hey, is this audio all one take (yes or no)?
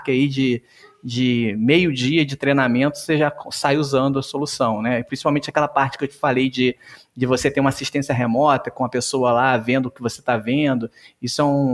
yes